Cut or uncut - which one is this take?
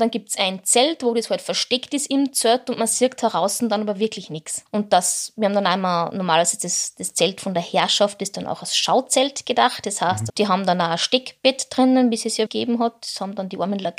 cut